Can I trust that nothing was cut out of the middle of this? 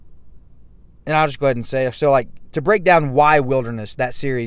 yes; 0 cuts

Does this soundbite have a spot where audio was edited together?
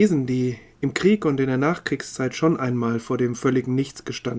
no; 0 cuts

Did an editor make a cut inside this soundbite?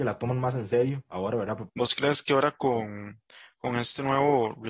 yes; 1 cut; at 1.7 s

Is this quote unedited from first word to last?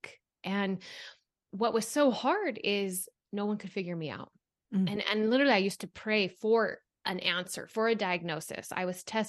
yes; 0 cuts

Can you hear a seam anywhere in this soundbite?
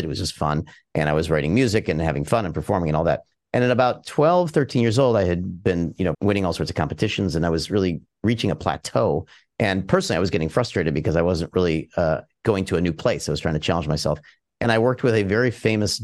yes; 1 cut; at 6.1 s

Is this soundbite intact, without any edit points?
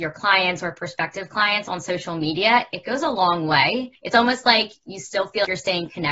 yes; 0 cuts

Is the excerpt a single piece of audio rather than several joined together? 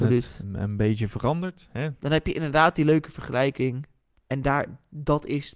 no; 1 cut; at 2.0 s

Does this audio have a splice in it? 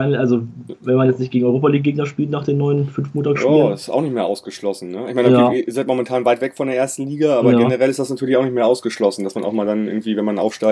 no; 0 cuts

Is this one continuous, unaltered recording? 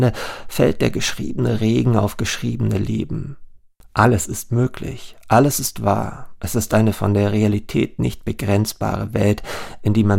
yes; 0 cuts

